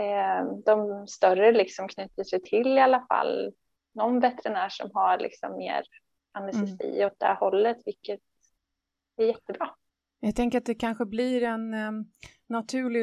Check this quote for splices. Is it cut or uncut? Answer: uncut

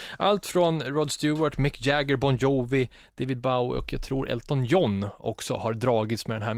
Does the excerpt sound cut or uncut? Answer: uncut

